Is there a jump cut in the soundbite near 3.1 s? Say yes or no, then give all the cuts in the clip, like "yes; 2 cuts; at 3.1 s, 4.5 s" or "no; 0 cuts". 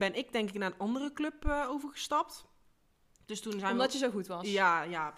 no; 0 cuts